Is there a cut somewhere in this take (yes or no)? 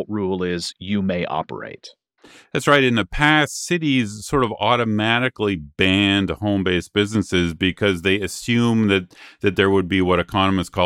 no